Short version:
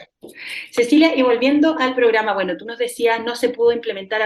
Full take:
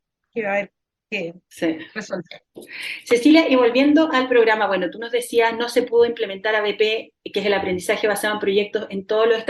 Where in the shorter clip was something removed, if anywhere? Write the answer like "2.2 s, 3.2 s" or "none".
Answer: none